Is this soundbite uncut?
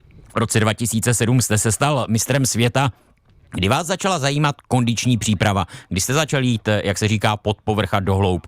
yes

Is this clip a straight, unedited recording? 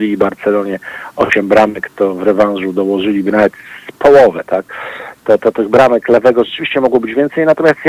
yes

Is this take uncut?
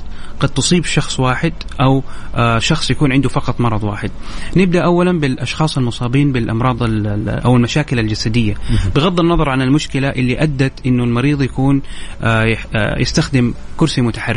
yes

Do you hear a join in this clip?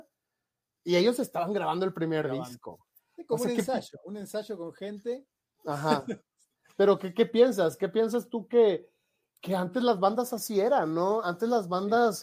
no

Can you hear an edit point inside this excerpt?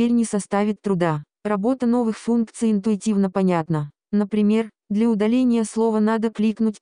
no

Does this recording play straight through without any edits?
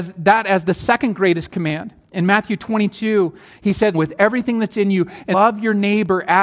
no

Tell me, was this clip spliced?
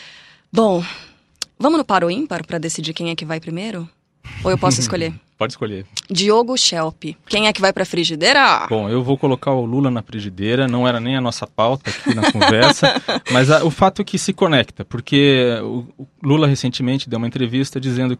no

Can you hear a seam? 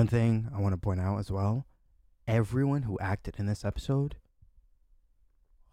no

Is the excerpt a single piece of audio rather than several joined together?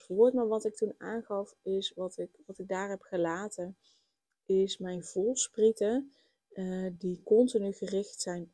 yes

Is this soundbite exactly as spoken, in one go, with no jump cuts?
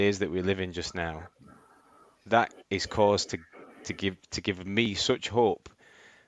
yes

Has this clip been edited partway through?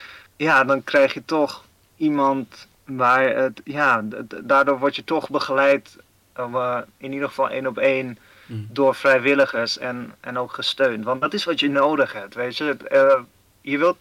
no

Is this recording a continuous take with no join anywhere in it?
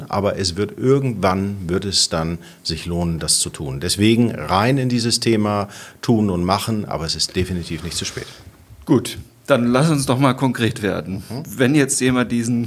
yes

